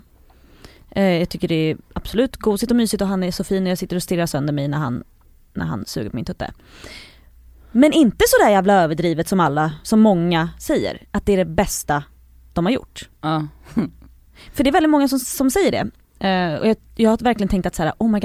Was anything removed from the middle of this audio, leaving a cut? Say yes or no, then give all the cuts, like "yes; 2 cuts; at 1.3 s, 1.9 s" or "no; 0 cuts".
no; 0 cuts